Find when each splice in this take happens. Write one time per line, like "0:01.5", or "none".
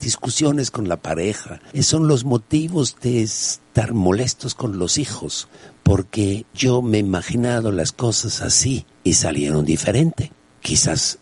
0:08.9